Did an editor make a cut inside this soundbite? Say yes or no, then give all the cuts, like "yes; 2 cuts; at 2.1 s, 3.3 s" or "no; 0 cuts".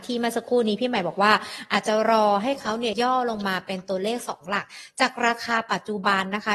yes; 1 cut; at 2.9 s